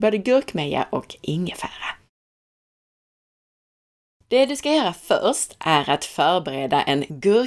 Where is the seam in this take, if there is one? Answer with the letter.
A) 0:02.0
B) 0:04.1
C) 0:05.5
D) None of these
D